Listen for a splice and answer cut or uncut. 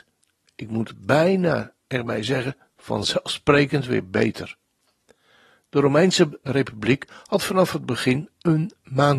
uncut